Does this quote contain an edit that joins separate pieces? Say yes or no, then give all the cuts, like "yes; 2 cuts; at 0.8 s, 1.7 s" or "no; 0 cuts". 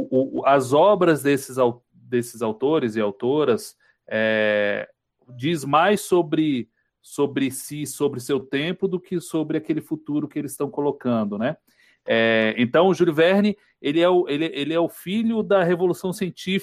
no; 0 cuts